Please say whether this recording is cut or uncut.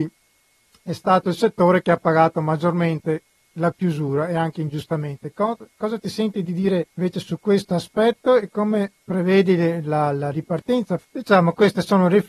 cut